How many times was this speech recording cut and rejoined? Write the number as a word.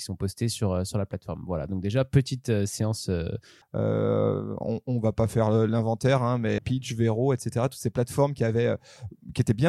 two